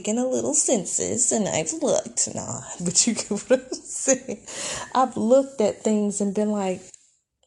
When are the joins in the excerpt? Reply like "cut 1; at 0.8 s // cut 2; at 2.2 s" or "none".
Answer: cut 1; at 2.8 s